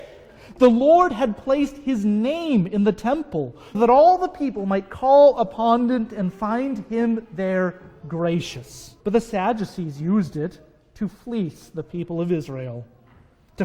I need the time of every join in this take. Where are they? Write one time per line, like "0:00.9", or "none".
0:03.7
0:09.0